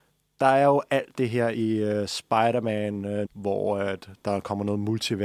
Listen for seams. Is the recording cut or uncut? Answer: cut